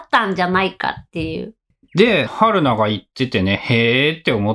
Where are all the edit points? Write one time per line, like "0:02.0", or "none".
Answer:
0:02.3

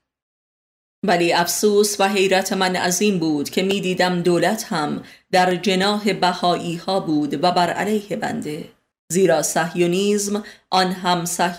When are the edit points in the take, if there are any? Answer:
0:08.9

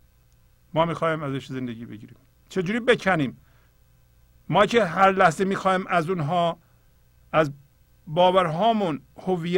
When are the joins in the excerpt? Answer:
none

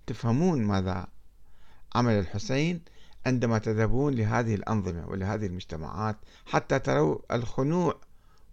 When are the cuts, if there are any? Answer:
0:06.3

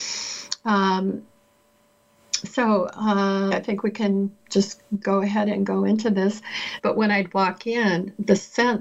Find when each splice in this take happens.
0:03.5
0:06.8

